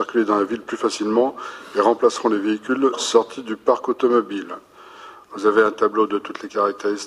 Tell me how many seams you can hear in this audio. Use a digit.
0